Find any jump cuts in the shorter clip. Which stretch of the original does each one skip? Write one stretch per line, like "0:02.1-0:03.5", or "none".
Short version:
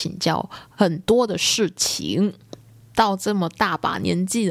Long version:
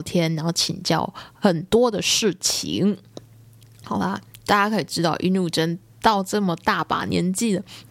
0:03.5-0:05.9